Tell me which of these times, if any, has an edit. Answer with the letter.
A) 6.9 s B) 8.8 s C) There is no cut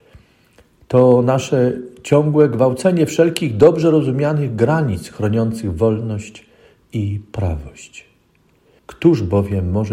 B